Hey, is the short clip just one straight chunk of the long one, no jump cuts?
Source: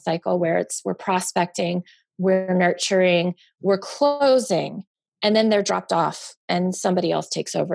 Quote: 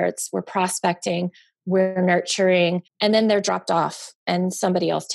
no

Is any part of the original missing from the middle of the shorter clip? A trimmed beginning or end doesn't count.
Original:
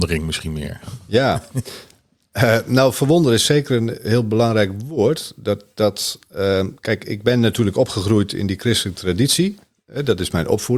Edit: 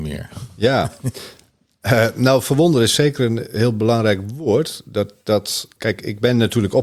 yes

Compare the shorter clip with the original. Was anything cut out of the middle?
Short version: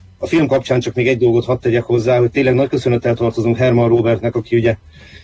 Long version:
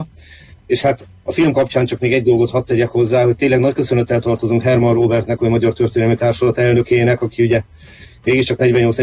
yes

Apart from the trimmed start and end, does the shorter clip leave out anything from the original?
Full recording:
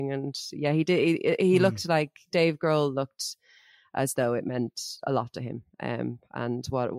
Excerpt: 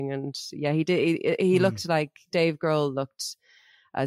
no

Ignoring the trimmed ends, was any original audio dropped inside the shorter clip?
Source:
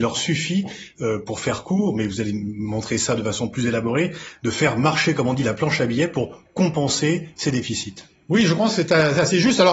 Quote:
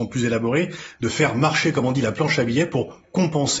no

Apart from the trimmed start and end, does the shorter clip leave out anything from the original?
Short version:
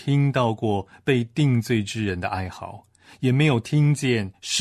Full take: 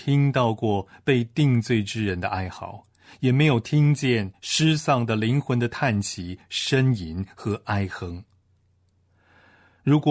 no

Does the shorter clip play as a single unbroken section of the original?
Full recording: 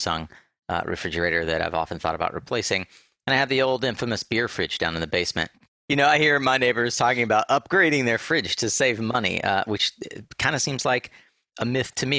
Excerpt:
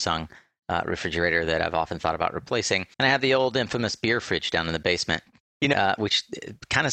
no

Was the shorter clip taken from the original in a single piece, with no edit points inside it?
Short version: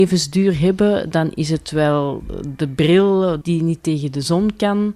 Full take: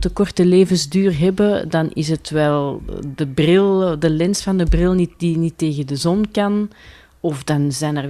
no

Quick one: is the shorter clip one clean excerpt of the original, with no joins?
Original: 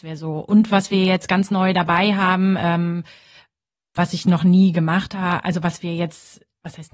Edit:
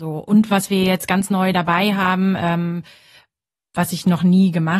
yes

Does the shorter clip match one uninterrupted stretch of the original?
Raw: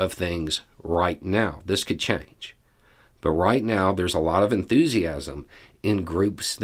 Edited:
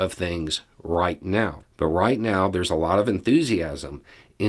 no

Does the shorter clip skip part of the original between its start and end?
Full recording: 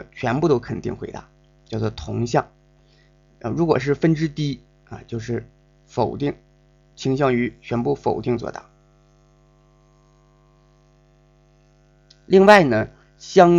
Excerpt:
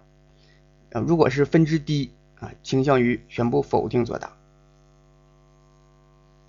yes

